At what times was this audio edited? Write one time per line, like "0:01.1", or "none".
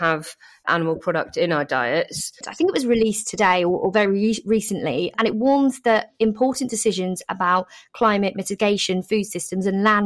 0:02.4